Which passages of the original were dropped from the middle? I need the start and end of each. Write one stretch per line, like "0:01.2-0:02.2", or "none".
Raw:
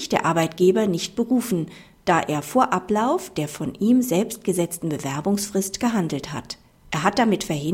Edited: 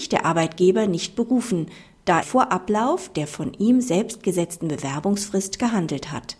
0:02.2-0:02.4